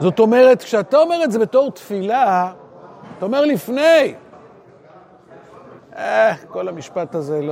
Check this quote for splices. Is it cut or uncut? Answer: cut